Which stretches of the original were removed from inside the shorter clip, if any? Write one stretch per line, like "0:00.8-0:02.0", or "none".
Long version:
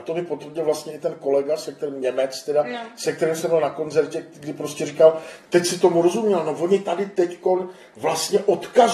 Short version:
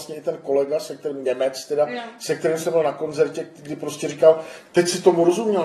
none